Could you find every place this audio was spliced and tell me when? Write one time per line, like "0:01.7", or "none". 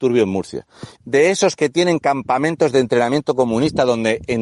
0:01.0

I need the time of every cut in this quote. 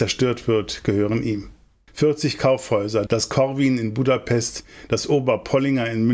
0:01.9
0:03.1

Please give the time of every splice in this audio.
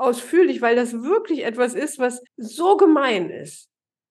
0:02.3

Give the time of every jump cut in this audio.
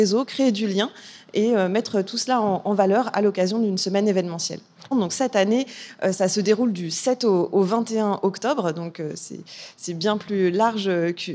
0:04.9

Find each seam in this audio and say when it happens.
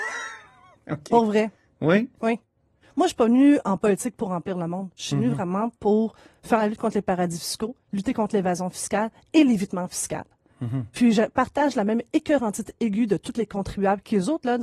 none

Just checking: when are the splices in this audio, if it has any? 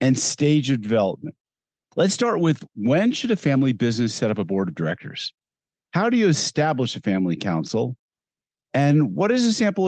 0:01.9
0:05.8

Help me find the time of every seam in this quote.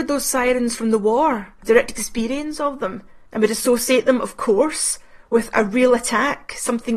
0:01.6
0:03.3

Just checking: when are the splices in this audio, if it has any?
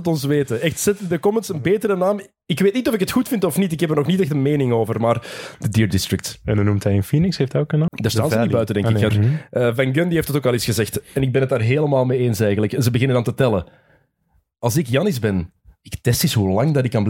0:07.9
0:09.1

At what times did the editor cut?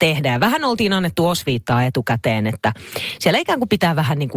none

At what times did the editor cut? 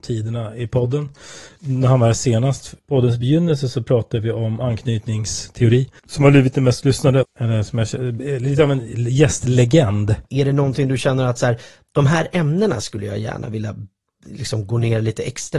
0:07.2
0:10.3

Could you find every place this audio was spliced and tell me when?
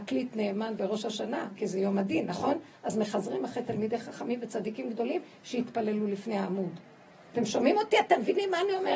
0:01.6

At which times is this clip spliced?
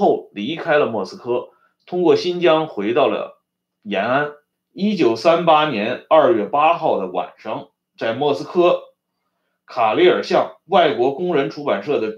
0:04.5

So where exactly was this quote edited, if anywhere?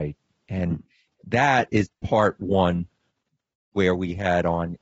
0:01.9

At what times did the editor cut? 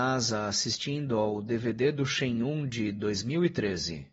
none

